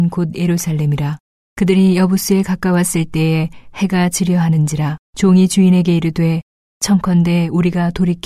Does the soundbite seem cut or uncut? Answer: cut